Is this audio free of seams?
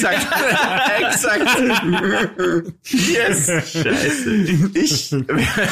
yes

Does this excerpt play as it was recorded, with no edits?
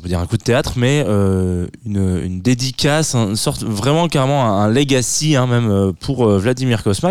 yes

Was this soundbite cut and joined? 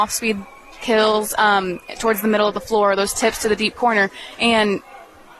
no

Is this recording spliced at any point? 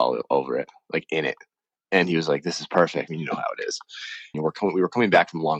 yes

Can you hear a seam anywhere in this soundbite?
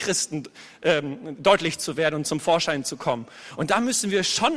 no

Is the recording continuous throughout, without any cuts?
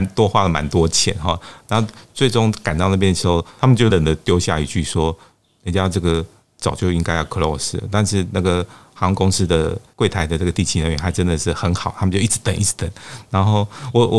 no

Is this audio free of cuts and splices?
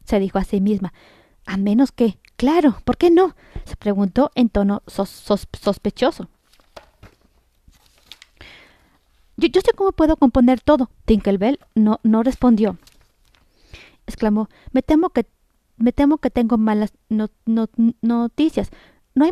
no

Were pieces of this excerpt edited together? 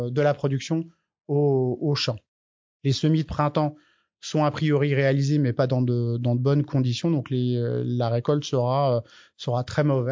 no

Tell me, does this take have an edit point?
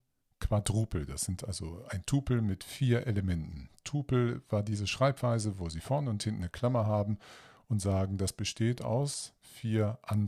no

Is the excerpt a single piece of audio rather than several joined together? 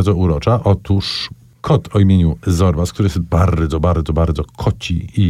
yes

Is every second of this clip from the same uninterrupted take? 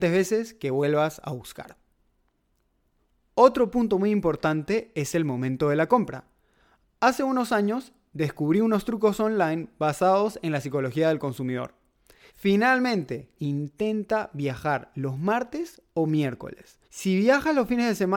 no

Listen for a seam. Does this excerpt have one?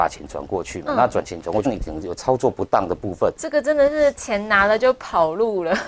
yes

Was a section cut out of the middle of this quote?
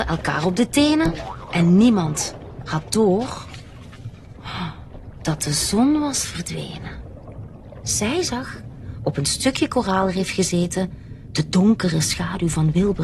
yes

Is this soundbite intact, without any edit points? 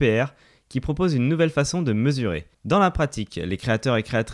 no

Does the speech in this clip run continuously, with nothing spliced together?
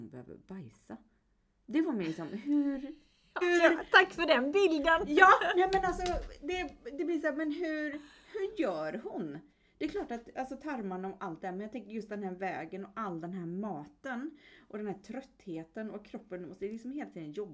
no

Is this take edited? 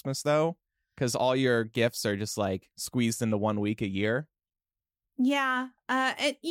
no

